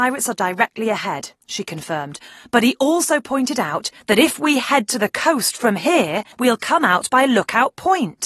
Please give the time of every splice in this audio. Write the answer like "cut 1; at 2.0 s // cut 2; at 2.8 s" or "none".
cut 1; at 6.3 s